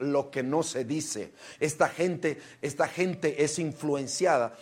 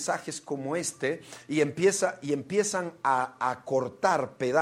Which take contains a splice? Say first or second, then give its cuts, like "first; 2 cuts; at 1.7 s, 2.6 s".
first; 1 cut; at 1.6 s